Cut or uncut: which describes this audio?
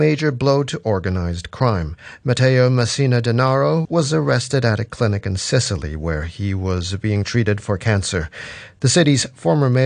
cut